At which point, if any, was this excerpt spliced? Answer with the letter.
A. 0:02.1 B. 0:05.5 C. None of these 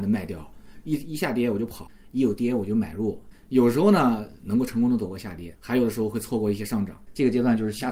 B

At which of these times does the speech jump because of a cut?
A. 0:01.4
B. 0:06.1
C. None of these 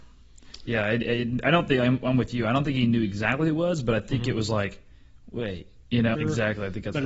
B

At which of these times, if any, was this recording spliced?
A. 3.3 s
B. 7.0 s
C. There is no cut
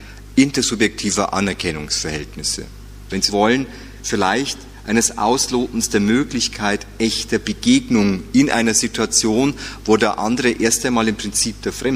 A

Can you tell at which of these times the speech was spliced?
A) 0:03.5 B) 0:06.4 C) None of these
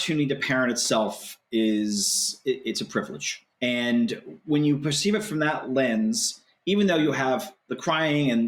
A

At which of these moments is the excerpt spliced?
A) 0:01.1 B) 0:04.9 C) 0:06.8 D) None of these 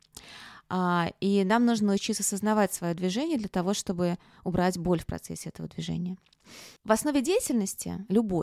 C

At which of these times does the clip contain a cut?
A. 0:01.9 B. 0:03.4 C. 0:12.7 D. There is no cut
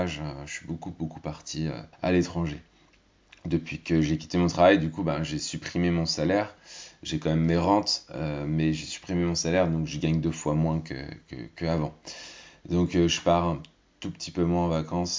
A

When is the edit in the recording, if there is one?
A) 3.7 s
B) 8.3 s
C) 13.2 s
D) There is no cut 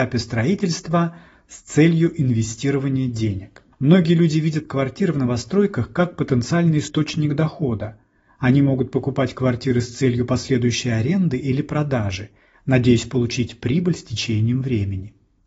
A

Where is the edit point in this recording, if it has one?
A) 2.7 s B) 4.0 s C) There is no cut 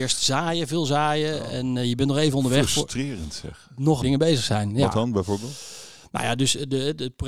B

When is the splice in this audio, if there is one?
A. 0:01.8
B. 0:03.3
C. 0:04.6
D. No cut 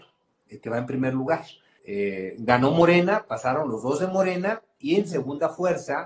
A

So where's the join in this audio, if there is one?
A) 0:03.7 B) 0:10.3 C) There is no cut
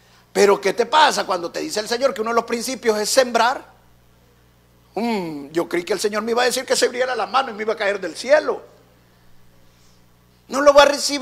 B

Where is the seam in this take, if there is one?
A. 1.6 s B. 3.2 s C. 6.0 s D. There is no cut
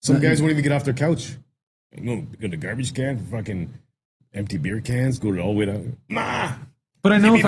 C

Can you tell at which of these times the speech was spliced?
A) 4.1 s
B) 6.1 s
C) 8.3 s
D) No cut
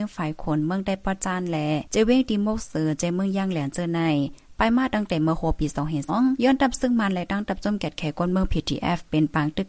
B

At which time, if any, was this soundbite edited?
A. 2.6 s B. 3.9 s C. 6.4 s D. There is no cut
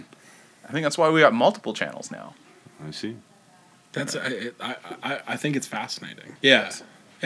C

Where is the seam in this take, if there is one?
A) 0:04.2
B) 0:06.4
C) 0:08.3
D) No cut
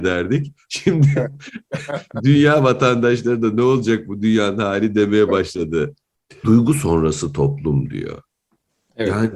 B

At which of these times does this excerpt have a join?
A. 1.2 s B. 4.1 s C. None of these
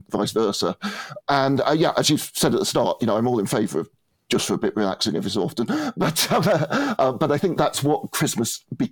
A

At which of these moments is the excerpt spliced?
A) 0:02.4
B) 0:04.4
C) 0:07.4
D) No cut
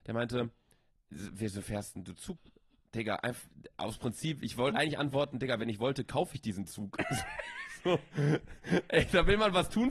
A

